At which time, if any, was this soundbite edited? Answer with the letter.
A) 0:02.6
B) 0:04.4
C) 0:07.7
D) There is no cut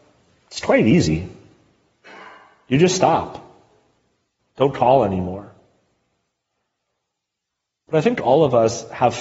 B